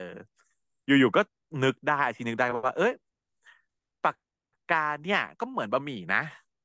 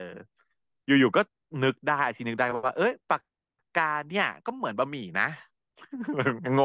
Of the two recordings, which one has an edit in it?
second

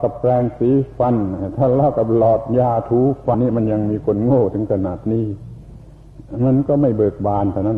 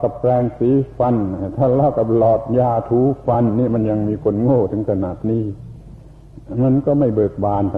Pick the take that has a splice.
first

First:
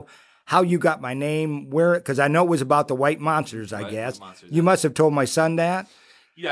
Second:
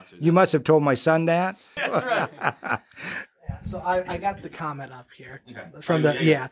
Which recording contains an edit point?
second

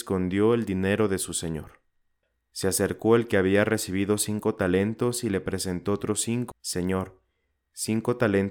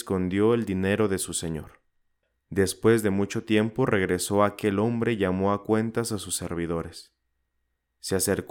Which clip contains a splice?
first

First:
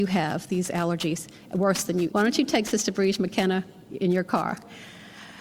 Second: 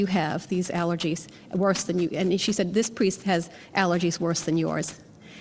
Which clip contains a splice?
first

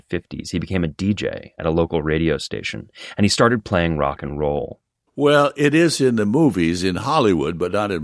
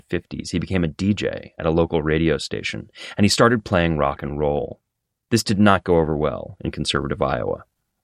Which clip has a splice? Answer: first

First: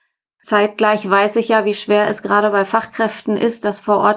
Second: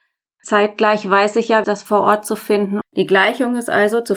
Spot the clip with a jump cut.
second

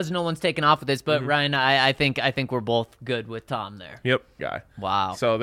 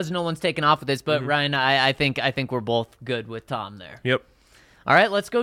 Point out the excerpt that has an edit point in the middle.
first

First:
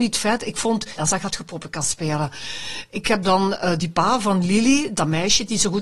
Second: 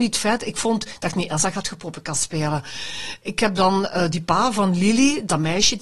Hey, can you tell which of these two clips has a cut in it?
first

